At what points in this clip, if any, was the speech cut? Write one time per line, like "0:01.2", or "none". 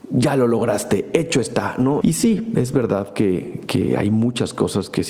0:02.0